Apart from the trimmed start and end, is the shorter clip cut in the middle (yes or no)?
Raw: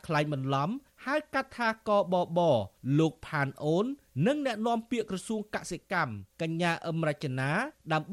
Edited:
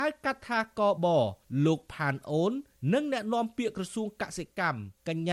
yes